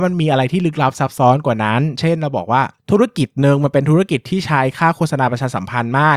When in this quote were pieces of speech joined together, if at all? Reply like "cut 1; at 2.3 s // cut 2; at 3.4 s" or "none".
cut 1; at 2.8 s